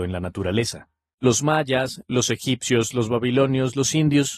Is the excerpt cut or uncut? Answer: cut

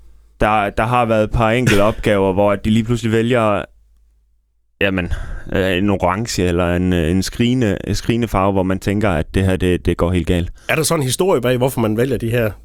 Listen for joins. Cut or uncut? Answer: uncut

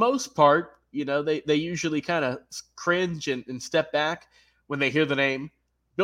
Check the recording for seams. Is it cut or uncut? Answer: uncut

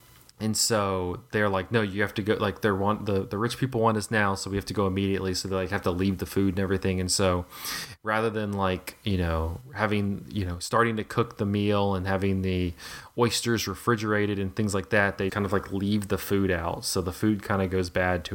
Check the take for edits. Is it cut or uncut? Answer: cut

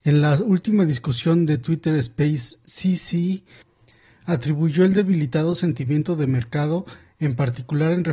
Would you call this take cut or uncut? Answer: uncut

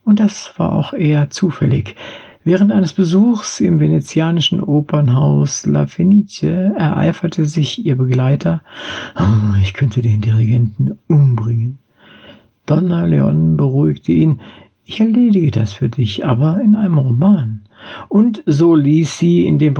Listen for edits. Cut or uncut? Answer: uncut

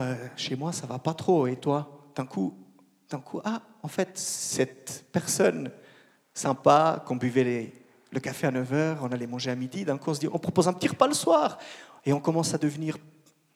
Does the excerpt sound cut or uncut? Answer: uncut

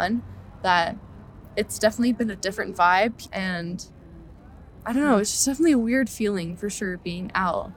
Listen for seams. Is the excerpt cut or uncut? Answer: cut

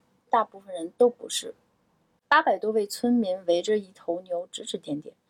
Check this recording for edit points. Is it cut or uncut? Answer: cut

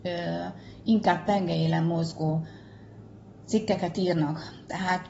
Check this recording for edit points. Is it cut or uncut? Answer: uncut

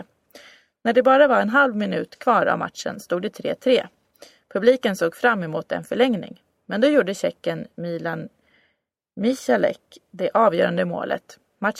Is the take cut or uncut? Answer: uncut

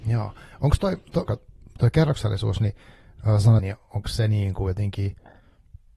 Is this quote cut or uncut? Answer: cut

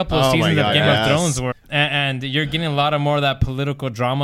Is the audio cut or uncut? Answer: cut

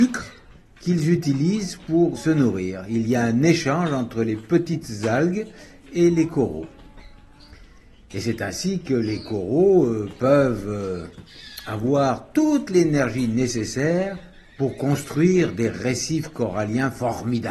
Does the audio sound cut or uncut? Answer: cut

